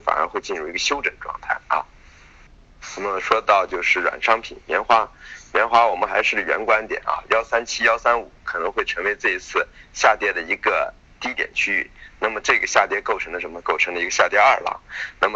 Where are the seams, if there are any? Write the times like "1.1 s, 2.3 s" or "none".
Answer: none